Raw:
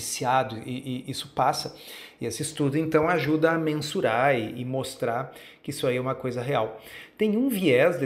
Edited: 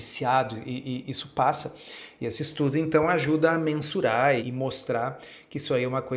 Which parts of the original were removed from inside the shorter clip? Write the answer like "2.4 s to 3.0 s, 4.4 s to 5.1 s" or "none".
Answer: 4.4 s to 4.5 s